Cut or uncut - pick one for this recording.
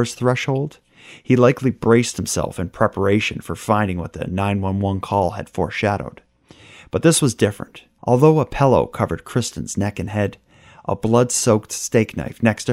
cut